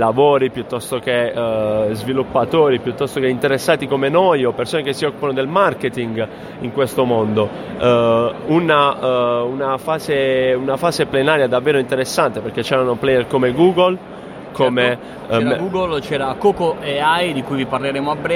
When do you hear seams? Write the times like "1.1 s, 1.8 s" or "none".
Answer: none